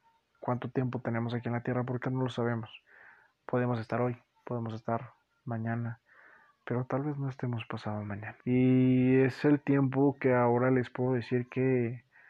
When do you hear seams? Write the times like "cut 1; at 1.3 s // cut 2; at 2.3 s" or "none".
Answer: cut 1; at 2.0 s // cut 2; at 8.4 s